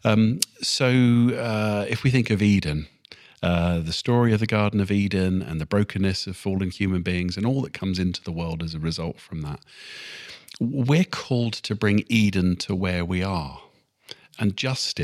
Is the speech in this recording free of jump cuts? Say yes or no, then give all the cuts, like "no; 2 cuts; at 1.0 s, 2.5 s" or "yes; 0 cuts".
yes; 0 cuts